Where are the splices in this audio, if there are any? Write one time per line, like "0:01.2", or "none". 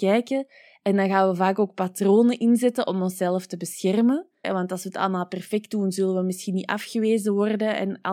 0:04.4